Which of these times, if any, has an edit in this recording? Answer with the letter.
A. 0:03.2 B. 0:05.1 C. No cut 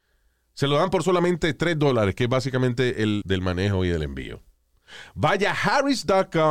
A